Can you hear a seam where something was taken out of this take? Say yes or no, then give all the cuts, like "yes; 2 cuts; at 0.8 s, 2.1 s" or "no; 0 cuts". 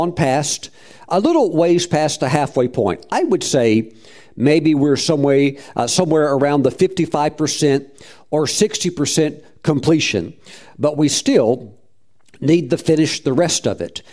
no; 0 cuts